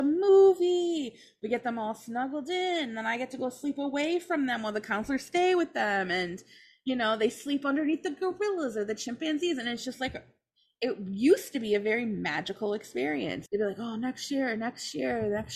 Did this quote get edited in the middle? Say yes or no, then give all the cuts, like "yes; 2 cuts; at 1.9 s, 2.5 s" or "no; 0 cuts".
yes; 1 cut; at 13.5 s